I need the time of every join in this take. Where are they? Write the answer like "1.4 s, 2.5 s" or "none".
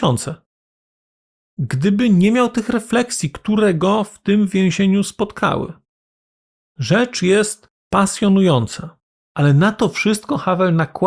9.2 s

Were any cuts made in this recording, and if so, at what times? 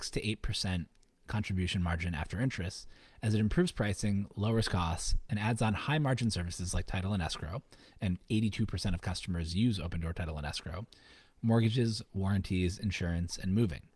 none

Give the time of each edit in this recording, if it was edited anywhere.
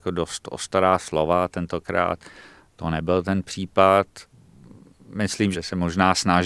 5.5 s

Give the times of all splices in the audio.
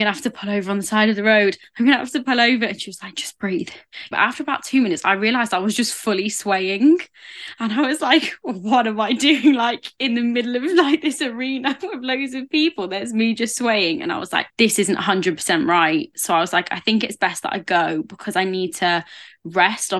4.1 s, 14.5 s

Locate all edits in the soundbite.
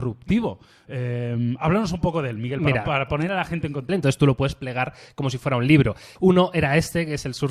3.9 s, 6.2 s

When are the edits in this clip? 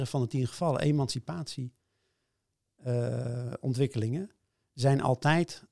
none

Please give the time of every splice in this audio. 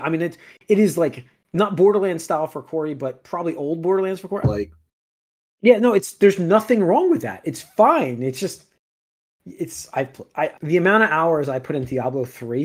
4.4 s, 10.5 s

